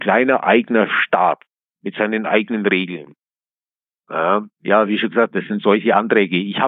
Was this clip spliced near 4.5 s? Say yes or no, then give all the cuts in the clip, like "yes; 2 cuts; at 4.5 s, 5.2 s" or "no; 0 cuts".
yes; 1 cut; at 4.5 s